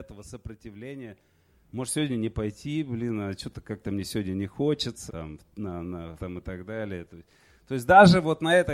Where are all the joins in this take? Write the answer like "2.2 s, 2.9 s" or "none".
5.1 s, 6.2 s

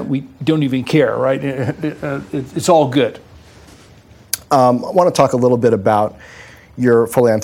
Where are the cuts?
none

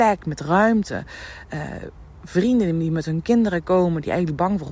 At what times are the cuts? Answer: none

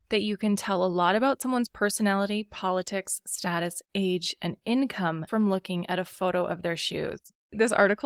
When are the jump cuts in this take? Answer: 5.3 s

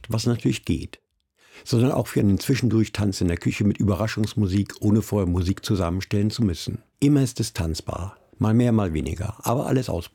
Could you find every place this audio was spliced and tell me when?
6.9 s, 8.3 s

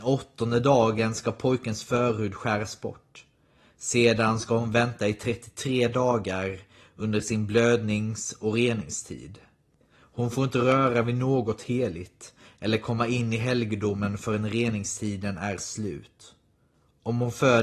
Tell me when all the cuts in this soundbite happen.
none

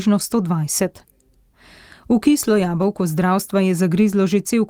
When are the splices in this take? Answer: none

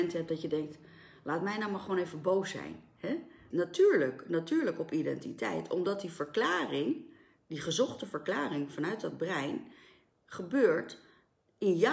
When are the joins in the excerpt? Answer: 3.5 s

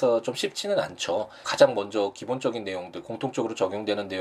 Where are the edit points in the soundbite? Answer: 1.4 s

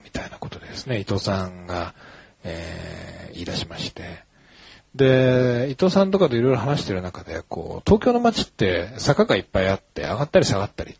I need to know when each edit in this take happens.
none

